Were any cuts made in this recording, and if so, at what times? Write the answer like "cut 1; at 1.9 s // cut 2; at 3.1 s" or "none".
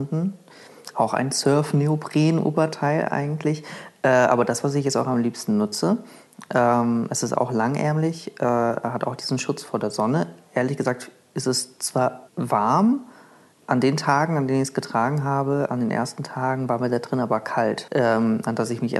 cut 1; at 12.3 s // cut 2; at 17.9 s